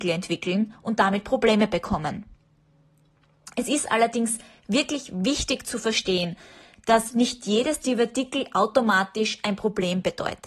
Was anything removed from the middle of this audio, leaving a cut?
no; 0 cuts

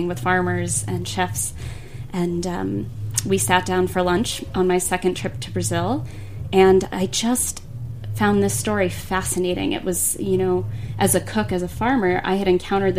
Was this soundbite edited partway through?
no; 0 cuts

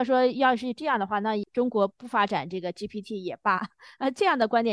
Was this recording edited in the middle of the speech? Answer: no; 0 cuts

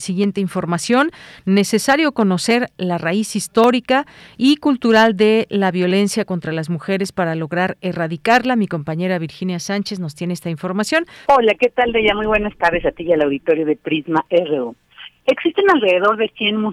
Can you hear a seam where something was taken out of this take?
yes; 1 cut; at 11.2 s

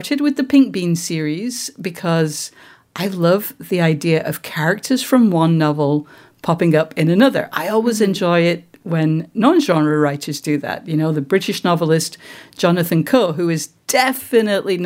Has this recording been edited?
no; 0 cuts

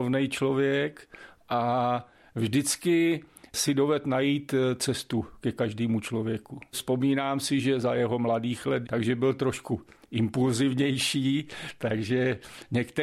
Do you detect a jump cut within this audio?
yes; 2 cuts; at 6.7 s, 8.8 s

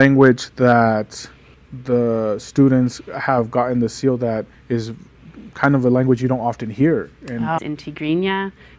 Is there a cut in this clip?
yes; 1 cut; at 7.6 s

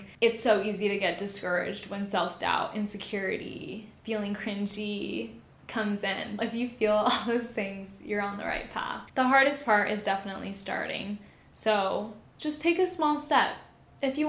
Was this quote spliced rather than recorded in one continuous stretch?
yes; 2 cuts; at 6.4 s, 9.1 s

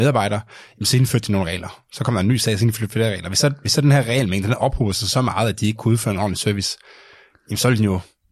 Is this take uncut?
yes; 0 cuts

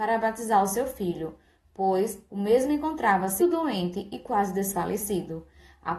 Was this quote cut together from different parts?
yes; 1 cut; at 3.4 s

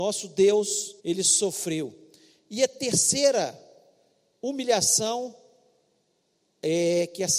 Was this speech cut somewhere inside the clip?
yes; 1 cut; at 1.0 s

